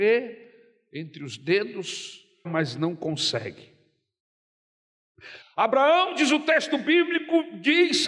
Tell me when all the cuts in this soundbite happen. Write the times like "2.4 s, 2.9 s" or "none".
2.4 s, 5.4 s